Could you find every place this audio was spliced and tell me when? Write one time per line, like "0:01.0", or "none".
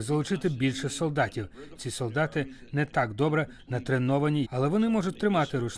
0:01.8
0:04.4

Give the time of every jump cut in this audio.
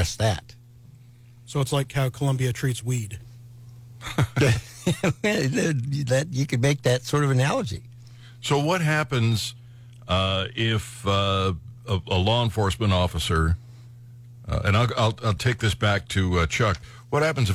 none

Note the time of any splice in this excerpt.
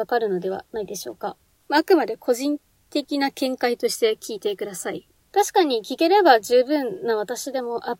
0:01.7

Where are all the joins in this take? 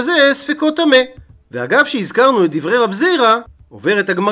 0:01.3

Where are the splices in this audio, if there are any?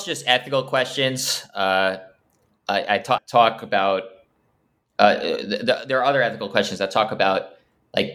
0:03.2

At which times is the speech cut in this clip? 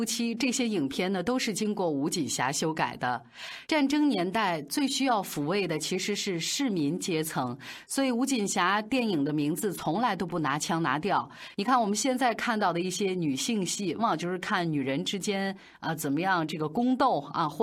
0:14.0

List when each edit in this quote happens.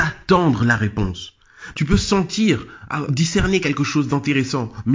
0:01.7
0:03.1

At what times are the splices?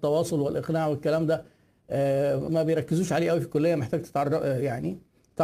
0:02.5

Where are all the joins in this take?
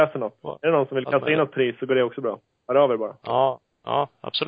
none

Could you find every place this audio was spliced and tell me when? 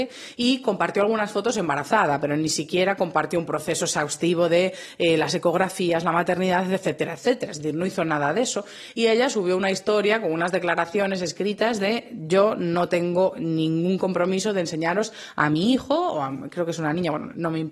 0:08.9

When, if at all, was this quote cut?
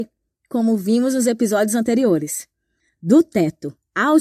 none

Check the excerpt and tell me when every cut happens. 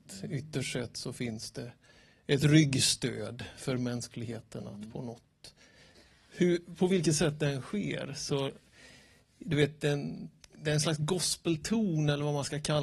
none

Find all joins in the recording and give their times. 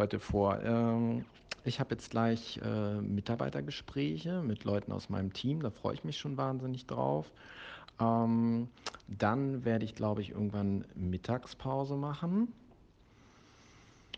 none

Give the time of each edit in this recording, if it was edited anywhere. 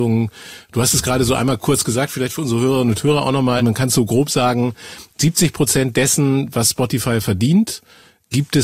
0:03.6

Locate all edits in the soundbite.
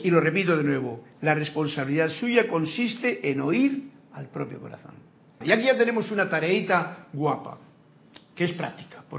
0:05.4

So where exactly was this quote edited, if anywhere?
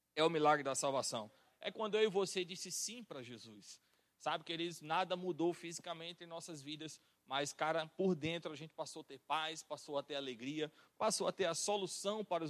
none

